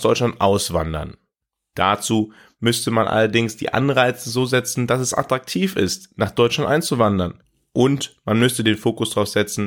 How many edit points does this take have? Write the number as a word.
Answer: zero